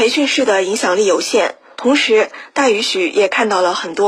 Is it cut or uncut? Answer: cut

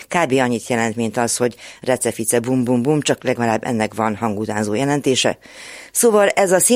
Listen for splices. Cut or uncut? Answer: uncut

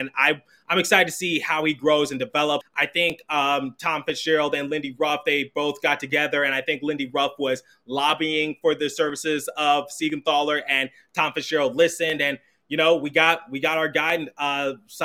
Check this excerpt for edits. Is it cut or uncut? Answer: cut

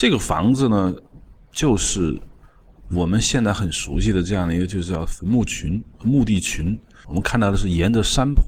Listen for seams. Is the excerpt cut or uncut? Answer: cut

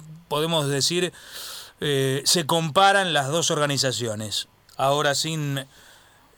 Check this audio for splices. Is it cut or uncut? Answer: cut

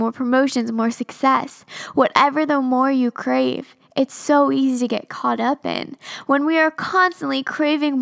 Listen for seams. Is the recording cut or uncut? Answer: uncut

